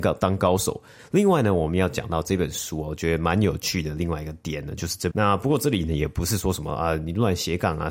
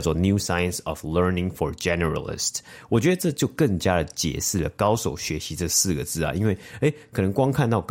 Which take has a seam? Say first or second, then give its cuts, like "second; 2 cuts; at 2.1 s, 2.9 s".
first; 2 cuts; at 1.0 s, 5.1 s